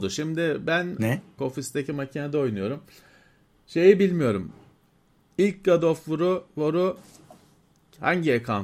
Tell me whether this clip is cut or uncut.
cut